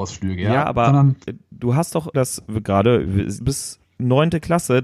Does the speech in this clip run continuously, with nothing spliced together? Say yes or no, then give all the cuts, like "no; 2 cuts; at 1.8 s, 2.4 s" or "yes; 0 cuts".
no; 2 cuts; at 2.1 s, 3.4 s